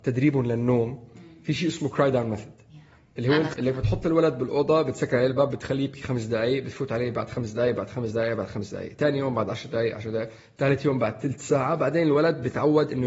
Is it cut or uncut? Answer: cut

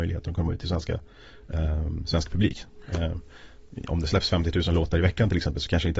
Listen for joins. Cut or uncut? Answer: uncut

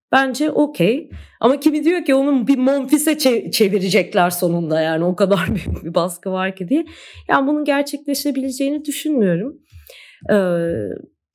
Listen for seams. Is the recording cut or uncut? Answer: uncut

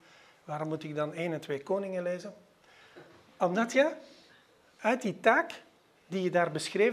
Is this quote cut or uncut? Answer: uncut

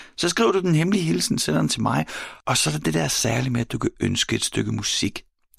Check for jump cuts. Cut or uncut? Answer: cut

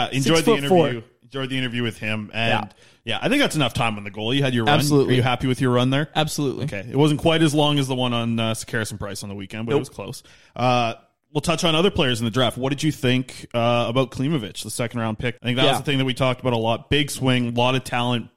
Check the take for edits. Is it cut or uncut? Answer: cut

